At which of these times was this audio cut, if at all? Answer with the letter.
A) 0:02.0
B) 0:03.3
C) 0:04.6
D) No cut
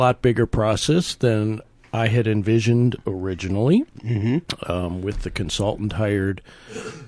D